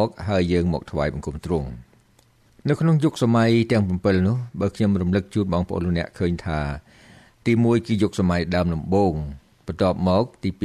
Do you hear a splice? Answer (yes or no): no